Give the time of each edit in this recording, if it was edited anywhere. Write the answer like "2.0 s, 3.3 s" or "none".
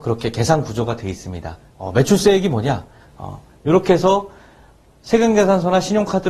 1.7 s, 3.0 s